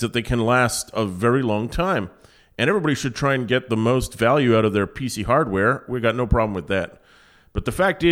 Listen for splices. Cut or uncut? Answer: uncut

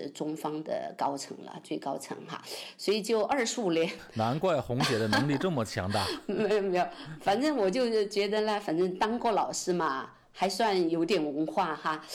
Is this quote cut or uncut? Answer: uncut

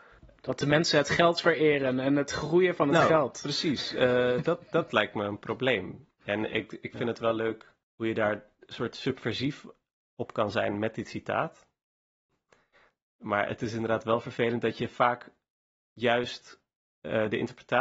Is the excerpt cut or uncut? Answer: cut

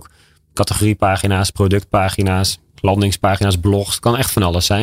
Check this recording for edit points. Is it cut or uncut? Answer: uncut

